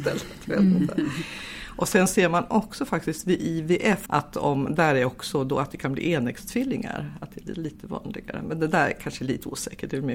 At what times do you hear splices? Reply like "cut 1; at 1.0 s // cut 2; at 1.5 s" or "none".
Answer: cut 1; at 4.1 s

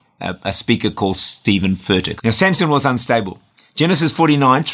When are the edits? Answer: cut 1; at 2.2 s

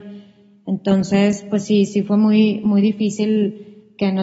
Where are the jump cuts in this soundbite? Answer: none

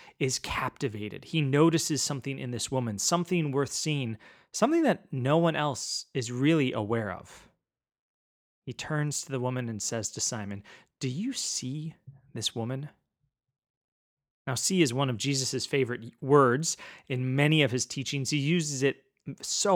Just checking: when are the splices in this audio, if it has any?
none

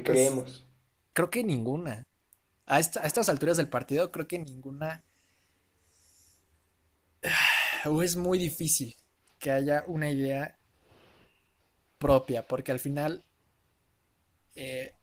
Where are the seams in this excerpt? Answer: cut 1; at 1.1 s

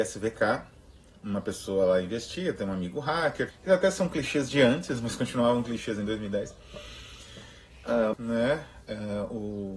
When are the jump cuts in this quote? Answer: cut 1; at 3.5 s // cut 2; at 8.1 s

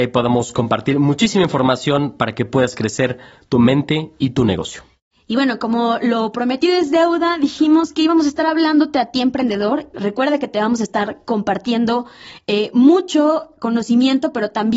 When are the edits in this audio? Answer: cut 1; at 9.9 s

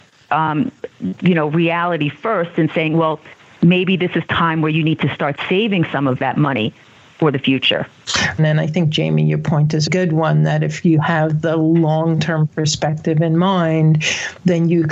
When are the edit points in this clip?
cut 1; at 8.4 s // cut 2; at 9.9 s

